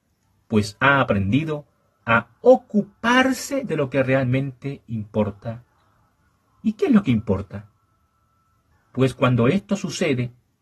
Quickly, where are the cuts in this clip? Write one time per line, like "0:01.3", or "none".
0:08.7